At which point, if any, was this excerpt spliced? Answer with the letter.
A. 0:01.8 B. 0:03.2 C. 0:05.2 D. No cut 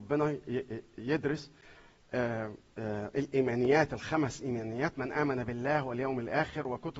D